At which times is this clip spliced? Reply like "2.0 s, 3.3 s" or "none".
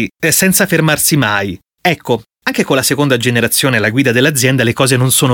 1.7 s